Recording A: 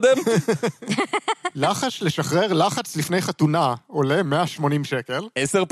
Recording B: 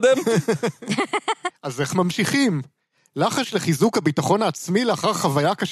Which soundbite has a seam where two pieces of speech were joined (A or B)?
B